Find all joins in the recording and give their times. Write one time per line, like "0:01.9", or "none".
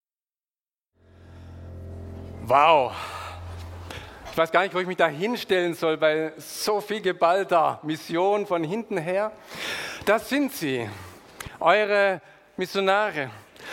none